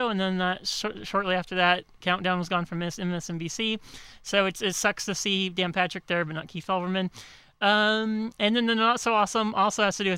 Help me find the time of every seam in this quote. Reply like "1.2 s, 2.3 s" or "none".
none